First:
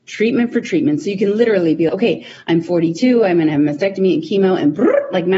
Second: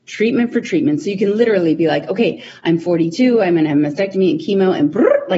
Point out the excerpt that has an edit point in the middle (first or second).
first